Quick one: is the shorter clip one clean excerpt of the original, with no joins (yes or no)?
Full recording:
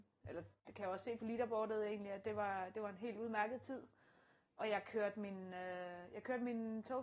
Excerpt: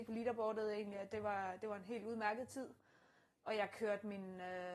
yes